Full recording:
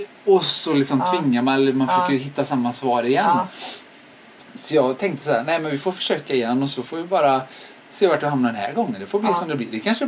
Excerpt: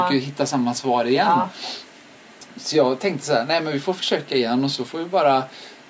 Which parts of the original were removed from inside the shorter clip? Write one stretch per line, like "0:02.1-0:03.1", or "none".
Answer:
none